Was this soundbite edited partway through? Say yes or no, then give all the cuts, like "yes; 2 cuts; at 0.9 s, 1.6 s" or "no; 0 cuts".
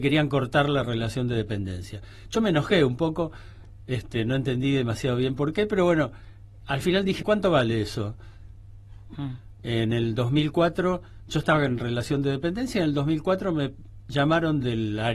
yes; 2 cuts; at 7.2 s, 9.1 s